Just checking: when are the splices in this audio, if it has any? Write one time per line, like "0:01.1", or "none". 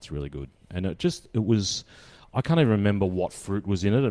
none